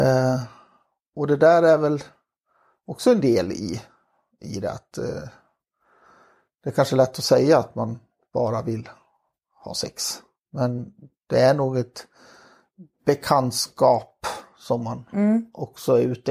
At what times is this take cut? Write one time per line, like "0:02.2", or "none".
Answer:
0:10.4
0:12.9